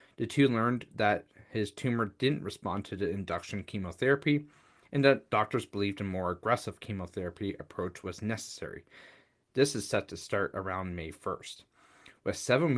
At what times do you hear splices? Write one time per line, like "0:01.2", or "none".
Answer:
none